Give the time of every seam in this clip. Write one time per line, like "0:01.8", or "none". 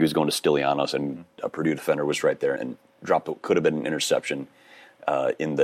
0:01.4
0:02.6